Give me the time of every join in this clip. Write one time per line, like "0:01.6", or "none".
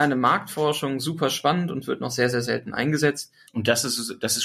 0:03.5